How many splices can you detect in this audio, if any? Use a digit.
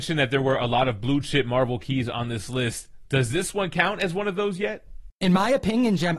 0